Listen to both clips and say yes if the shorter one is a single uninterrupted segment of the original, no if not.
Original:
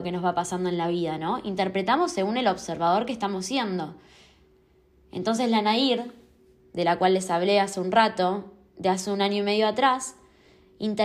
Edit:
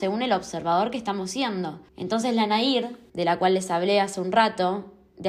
no